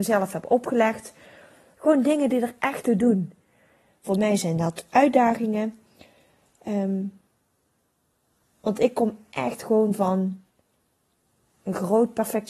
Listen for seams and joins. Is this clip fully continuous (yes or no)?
no